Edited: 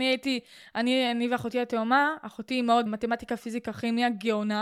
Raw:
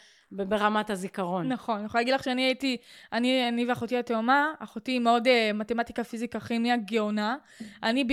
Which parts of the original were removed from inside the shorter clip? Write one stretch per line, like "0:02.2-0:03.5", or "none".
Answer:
0:05.2-0:05.5